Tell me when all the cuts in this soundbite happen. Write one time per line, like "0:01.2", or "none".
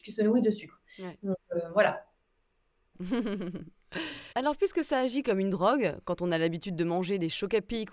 0:02.9
0:04.3